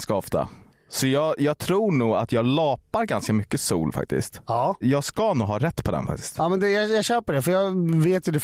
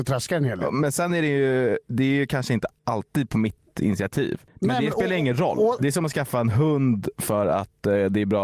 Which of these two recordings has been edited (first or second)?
second